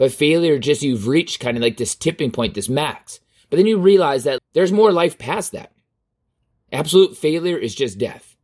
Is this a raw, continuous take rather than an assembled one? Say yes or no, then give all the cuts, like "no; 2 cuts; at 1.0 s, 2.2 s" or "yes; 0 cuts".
no; 2 cuts; at 4.4 s, 6.5 s